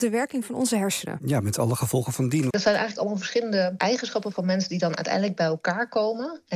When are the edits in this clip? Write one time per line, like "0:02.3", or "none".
0:02.5